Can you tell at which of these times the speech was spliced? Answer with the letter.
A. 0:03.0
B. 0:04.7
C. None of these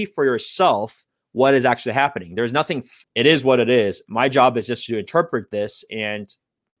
A